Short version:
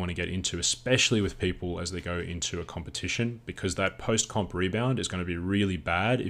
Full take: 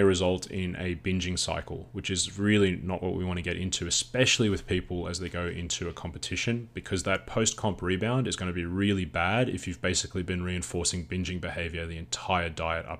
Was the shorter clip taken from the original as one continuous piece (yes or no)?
yes